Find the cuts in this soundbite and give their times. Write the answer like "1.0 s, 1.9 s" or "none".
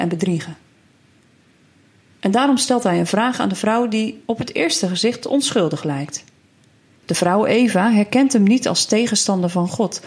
7.0 s

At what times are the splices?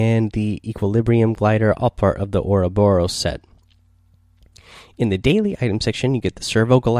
none

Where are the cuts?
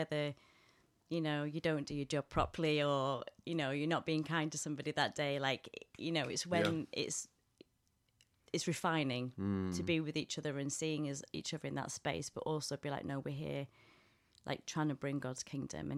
none

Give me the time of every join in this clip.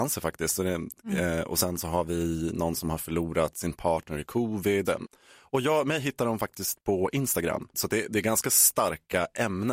4.8 s, 7.7 s

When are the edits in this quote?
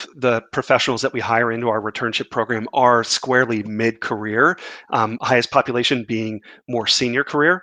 5.2 s

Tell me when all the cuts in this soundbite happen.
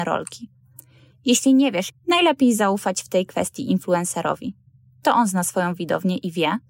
1.9 s

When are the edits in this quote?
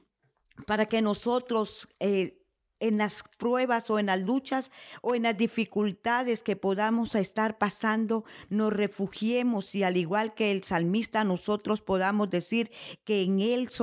none

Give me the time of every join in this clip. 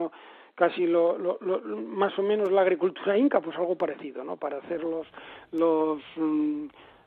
none

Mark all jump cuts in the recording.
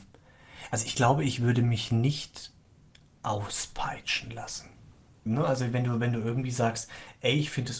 5.3 s

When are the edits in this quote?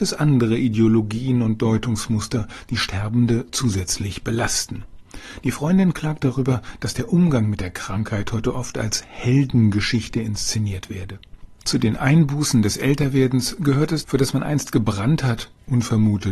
11.6 s, 14.0 s

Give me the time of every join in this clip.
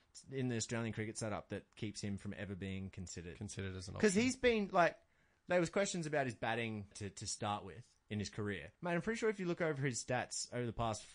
6.9 s, 8.7 s

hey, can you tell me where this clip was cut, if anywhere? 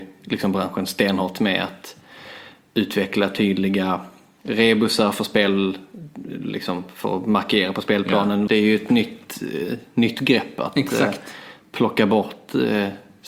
8.5 s

